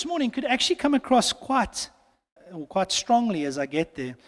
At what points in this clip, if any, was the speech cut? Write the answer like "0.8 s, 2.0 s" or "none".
2.4 s